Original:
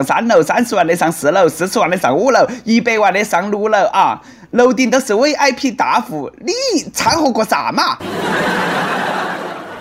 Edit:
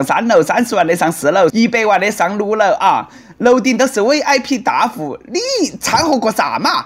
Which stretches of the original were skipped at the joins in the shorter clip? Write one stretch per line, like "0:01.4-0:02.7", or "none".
0:01.5-0:02.6